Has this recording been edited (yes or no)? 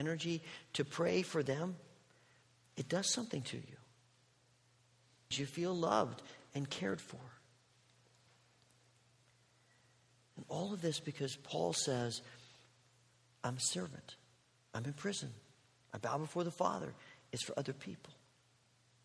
yes